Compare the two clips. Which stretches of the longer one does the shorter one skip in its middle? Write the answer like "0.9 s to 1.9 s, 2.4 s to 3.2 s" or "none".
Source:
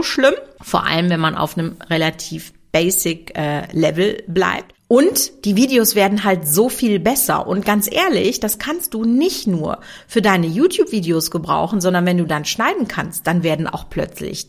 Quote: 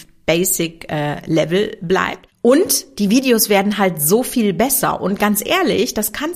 none